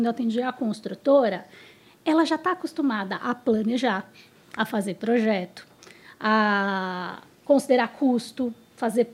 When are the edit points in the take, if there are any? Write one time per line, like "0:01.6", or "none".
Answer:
none

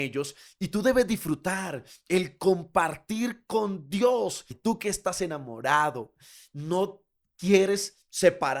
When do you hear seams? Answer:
0:04.5

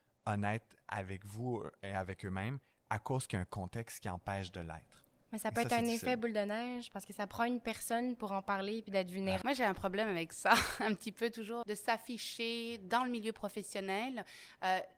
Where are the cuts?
0:09.4
0:11.6

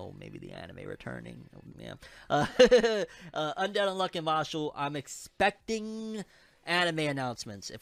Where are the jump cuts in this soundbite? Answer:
0:01.7

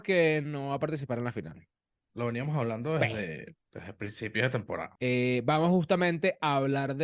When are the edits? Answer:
0:02.1
0:04.9

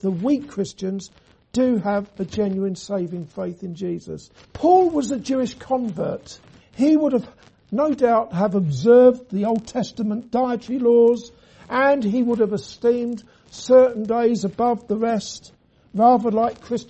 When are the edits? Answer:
0:04.4
0:06.6

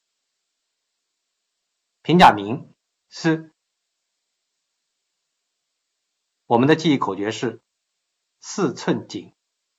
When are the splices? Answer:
0:03.1

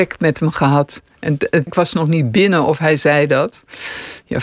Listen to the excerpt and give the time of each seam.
0:01.7

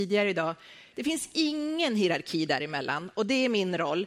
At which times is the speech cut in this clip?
0:00.9

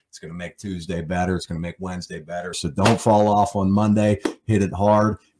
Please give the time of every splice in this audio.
0:02.5

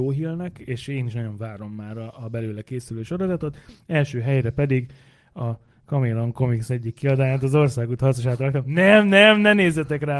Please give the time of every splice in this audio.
none

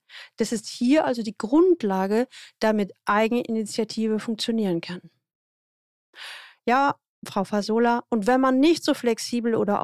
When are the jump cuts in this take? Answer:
none

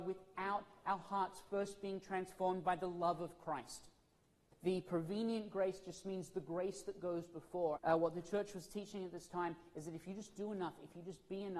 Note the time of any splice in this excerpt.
0:04.5
0:07.8

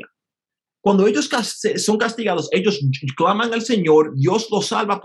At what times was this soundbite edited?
none

